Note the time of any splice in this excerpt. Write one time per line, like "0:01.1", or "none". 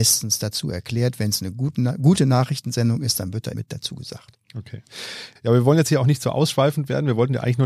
0:03.5
0:05.4